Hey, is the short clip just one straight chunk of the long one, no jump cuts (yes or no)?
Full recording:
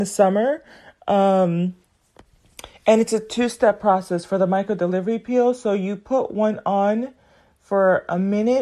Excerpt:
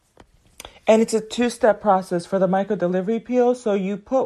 yes